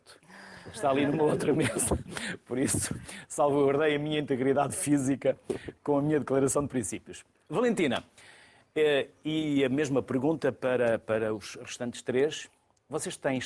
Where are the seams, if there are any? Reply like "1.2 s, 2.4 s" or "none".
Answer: none